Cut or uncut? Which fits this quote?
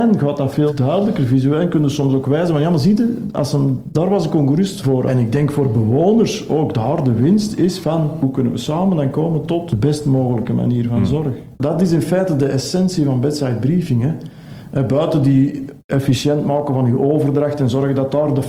uncut